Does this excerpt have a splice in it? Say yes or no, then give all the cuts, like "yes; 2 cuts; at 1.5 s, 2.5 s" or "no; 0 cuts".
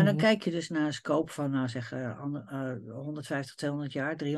no; 0 cuts